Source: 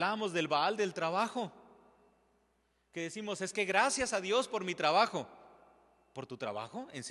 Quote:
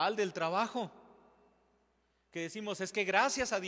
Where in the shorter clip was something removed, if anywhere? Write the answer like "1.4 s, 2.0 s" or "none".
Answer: none

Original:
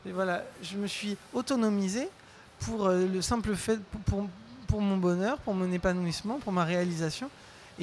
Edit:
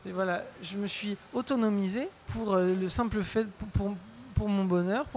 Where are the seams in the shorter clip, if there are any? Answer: 2.2 s

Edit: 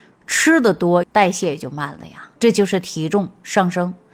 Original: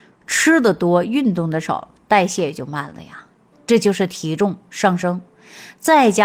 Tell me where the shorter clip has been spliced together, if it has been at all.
1.0 s, 2.4 s

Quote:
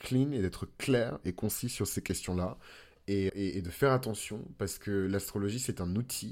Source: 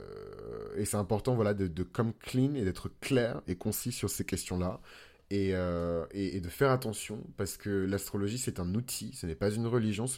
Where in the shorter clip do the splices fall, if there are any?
3.3 s

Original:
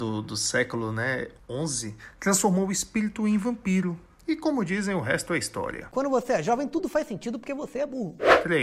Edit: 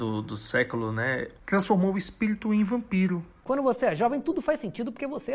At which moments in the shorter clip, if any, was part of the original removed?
1.4 s, 3.4 s

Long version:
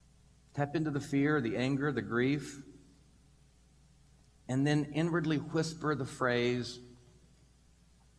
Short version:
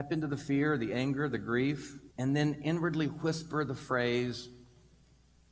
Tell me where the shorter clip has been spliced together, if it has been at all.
2.1 s

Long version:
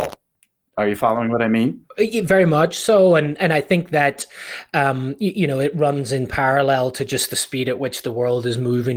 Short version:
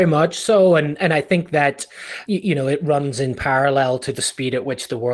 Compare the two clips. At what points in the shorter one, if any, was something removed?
2.3 s, 4.1 s

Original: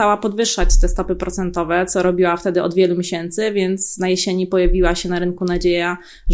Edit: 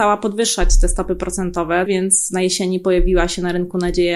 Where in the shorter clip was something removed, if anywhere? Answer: 1.9 s

